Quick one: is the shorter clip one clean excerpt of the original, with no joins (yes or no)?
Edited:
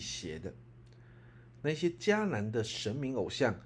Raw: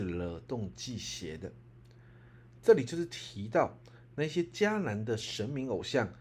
no